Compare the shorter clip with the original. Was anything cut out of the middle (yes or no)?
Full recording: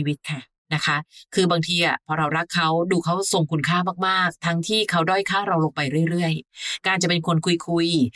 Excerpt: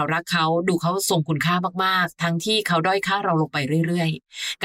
no